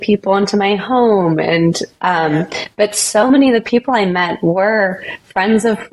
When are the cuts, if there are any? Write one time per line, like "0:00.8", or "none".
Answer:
none